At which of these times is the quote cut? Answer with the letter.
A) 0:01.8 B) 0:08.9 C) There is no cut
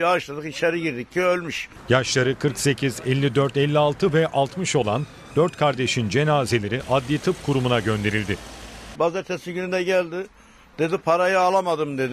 B